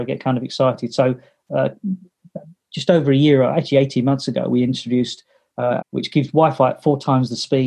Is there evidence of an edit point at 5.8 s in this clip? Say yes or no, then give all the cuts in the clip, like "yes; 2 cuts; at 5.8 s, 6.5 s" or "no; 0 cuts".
yes; 1 cut; at 5.8 s